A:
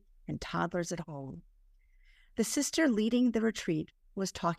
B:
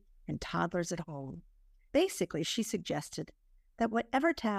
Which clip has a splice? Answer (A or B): B